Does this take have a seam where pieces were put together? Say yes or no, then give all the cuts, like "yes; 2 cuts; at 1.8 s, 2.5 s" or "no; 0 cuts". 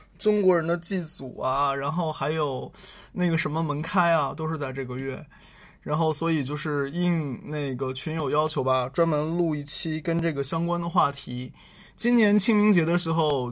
no; 0 cuts